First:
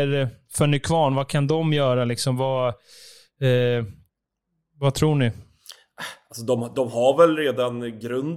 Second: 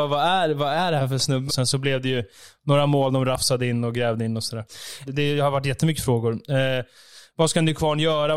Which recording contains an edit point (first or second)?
second